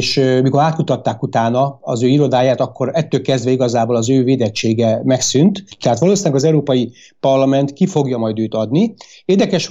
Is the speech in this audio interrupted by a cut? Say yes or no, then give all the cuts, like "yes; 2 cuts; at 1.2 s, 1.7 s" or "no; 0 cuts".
yes; 1 cut; at 5.7 s